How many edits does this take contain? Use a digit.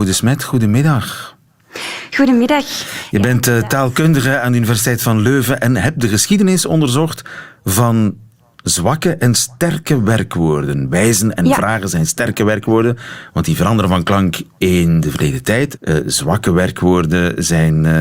1